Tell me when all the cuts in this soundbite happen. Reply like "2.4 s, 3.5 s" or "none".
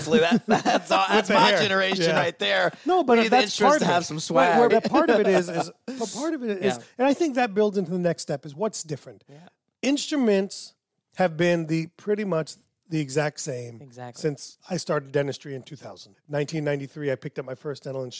4.7 s, 16.1 s

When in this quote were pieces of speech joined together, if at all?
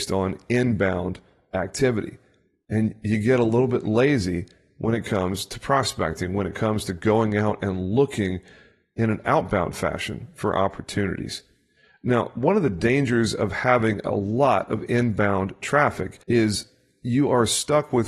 16.2 s

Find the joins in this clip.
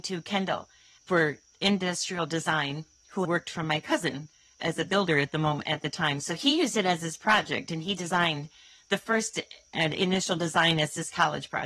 3.2 s

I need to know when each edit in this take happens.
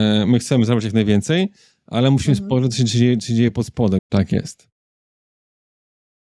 4.0 s

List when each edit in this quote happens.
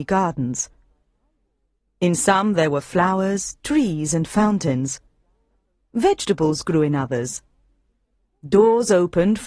none

